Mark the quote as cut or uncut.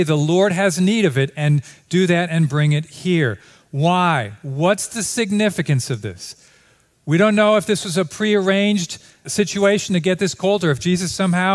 cut